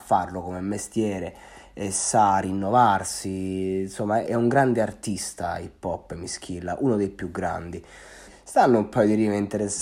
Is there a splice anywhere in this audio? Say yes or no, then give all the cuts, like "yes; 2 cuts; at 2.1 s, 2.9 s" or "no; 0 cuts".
yes; 2 cuts; at 4.2 s, 8.3 s